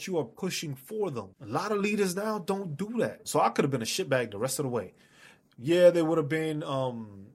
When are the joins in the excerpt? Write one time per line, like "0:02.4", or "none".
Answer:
0:01.3
0:03.2